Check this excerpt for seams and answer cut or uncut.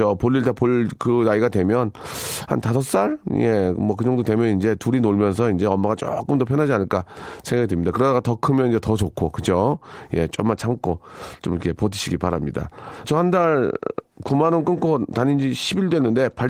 cut